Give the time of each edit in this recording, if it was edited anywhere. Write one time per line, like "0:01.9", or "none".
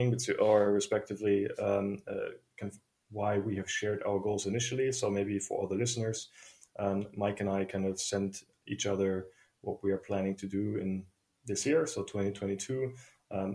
none